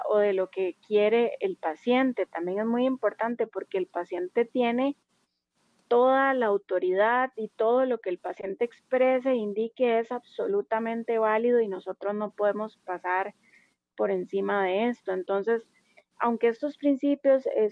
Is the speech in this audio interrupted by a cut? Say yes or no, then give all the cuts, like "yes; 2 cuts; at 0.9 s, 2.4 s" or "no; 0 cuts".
no; 0 cuts